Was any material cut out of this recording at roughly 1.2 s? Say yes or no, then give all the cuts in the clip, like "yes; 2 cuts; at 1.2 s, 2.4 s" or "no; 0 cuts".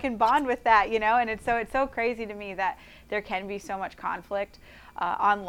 no; 0 cuts